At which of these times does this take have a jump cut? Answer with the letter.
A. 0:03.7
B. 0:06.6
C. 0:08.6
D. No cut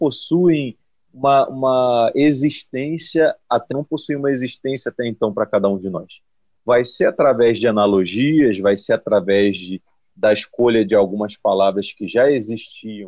A